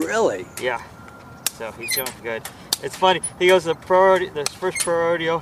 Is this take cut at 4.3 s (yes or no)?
no